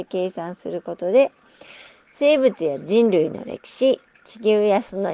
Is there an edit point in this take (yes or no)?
no